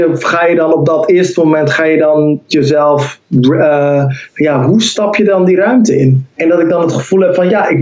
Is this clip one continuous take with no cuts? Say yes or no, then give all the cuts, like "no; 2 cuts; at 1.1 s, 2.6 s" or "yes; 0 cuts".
no; 1 cut; at 6.3 s